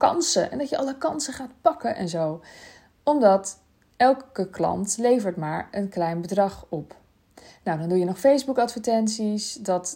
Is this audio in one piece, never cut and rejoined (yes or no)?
yes